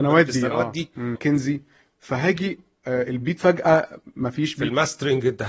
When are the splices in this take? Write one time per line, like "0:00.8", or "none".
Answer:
0:01.2